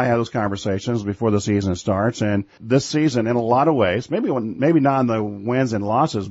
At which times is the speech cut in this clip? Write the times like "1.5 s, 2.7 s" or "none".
2.6 s